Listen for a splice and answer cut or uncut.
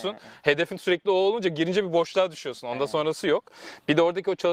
uncut